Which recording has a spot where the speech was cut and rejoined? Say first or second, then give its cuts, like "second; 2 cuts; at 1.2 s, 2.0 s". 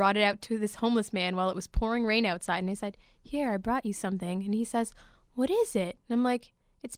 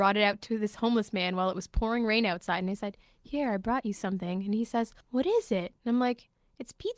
second; 1 cut; at 5.0 s